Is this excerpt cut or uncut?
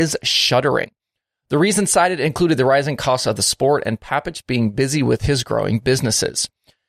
uncut